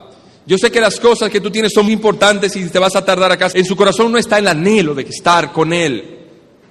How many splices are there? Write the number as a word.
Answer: two